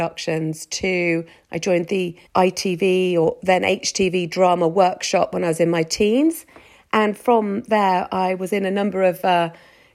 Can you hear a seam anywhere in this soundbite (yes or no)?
yes